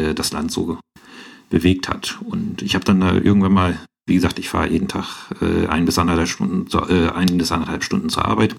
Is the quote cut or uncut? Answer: uncut